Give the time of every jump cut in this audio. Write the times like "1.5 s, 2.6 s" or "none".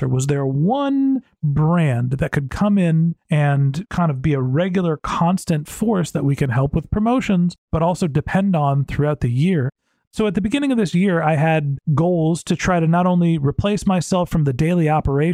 none